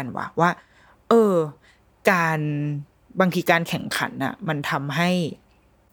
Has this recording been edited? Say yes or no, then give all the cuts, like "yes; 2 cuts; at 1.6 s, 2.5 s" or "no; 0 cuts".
no; 0 cuts